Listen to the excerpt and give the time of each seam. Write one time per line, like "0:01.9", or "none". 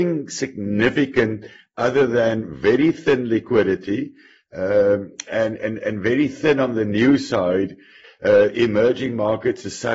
0:08.0